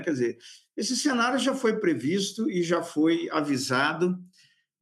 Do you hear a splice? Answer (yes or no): no